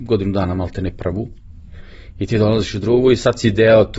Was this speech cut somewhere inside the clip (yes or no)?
no